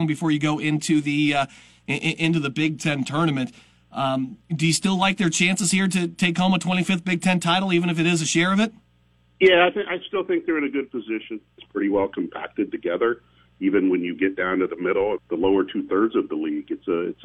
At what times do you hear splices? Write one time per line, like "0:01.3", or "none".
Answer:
0:11.6
0:15.2